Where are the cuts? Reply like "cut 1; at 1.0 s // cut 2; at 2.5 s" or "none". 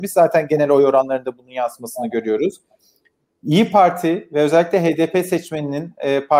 none